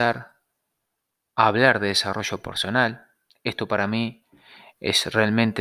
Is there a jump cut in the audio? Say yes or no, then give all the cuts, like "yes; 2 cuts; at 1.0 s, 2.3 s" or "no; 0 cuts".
no; 0 cuts